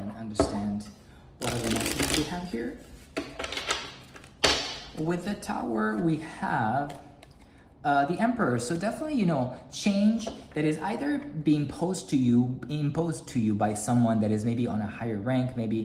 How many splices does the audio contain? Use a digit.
0